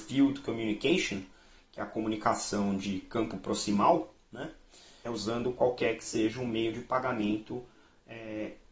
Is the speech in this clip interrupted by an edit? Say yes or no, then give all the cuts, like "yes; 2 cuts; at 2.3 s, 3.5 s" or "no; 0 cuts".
yes; 1 cut; at 5.1 s